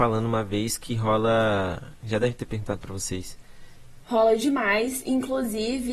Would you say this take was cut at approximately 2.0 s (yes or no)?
no